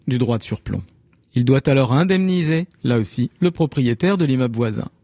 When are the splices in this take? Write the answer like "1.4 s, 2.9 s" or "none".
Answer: 1.2 s